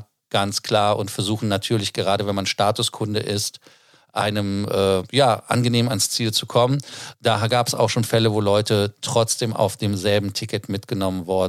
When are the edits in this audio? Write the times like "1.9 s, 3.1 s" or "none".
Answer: 7.1 s